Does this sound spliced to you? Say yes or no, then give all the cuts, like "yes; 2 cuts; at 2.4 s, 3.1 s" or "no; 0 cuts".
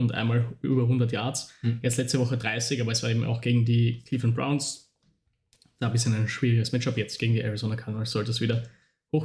no; 0 cuts